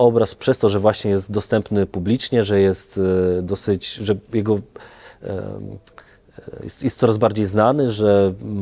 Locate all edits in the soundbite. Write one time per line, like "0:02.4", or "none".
none